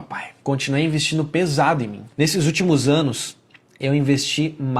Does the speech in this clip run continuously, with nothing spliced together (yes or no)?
no